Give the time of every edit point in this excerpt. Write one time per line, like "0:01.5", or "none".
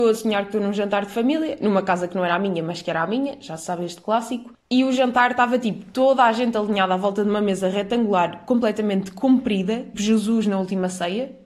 0:04.6
0:09.9